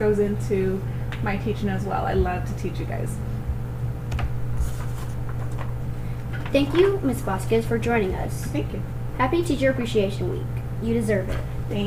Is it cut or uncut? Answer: uncut